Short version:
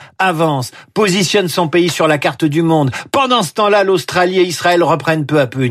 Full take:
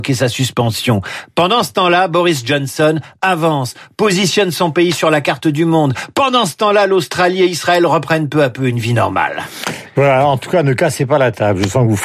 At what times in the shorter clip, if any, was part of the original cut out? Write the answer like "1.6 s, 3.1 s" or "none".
none